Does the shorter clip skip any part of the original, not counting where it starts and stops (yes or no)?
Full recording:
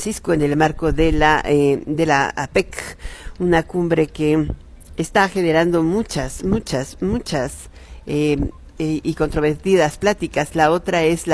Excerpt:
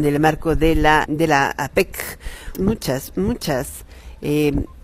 yes